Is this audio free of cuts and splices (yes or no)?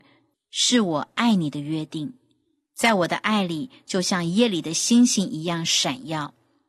yes